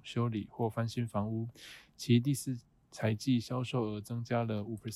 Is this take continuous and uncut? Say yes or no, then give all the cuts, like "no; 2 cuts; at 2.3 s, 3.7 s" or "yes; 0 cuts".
yes; 0 cuts